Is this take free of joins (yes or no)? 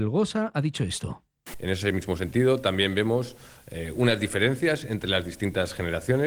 no